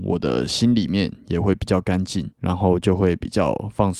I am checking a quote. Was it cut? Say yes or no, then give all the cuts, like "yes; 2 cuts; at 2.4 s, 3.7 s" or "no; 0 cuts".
yes; 1 cut; at 2.3 s